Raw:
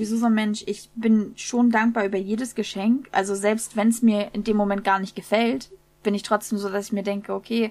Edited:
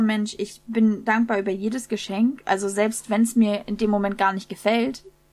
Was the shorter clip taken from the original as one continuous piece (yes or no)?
no